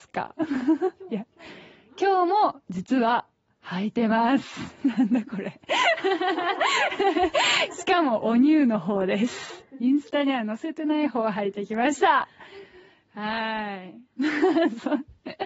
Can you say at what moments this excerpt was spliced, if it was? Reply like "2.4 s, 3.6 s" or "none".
none

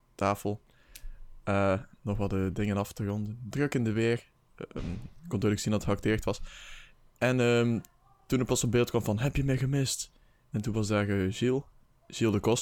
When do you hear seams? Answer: none

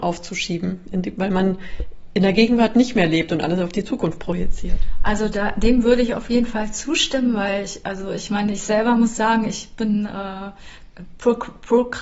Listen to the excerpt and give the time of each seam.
none

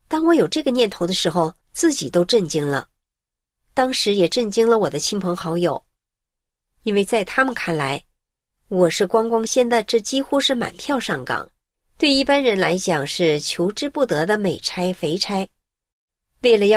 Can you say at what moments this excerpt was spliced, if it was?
1.6 s, 9.5 s, 11.7 s

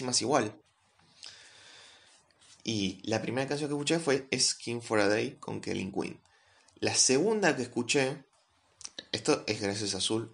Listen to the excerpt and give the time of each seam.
none

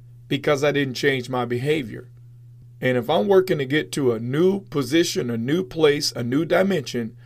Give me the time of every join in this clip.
2.6 s

